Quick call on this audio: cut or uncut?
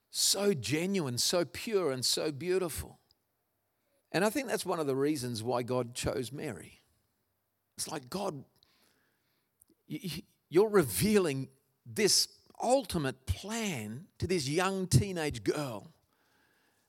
cut